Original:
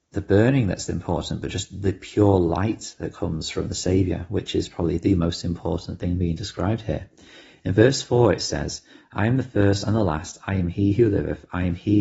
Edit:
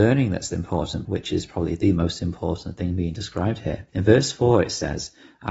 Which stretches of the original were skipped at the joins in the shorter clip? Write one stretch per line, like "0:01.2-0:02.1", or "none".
0:01.4-0:04.3
0:07.1-0:07.6

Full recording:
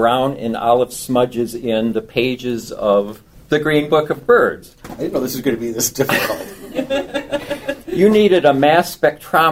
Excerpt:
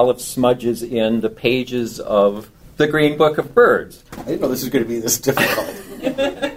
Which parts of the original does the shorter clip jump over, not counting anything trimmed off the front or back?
none

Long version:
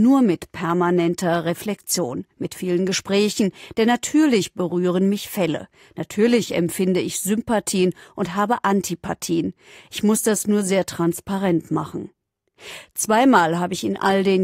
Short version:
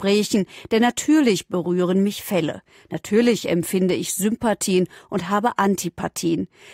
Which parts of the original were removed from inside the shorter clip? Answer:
none

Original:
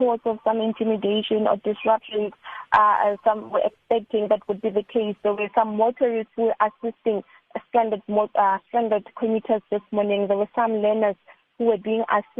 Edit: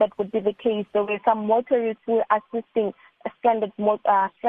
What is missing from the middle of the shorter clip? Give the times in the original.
none

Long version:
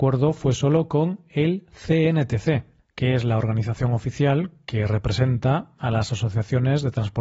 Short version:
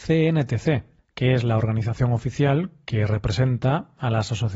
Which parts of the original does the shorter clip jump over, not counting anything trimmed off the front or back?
none

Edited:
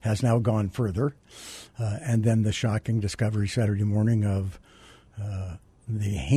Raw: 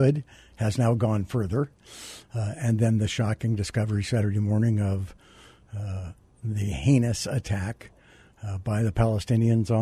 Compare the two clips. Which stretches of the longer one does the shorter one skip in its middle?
none

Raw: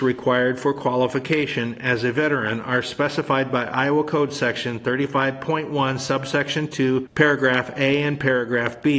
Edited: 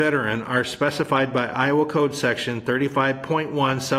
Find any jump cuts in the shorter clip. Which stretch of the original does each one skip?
none

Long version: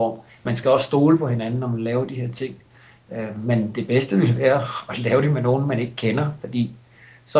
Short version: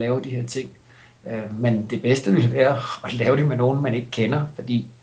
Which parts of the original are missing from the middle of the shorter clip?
none

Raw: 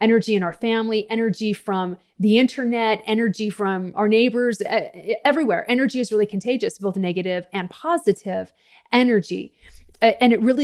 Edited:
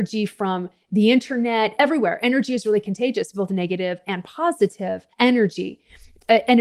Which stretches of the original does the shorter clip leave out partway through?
0:03.0-0:05.2
0:08.6-0:08.9

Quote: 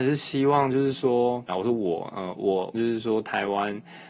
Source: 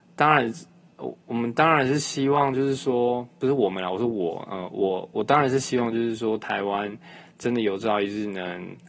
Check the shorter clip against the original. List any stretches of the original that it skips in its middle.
0:03.3-0:03.8
0:05.1-0:05.9

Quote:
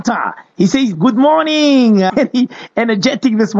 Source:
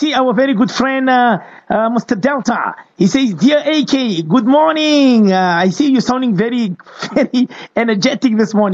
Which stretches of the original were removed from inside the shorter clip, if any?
0:03.4-0:04.2
0:05.4-0:07.1

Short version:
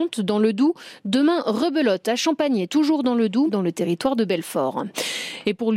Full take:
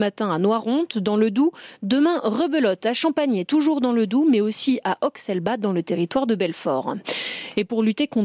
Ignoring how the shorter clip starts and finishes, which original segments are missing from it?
0:04.2-0:05.6

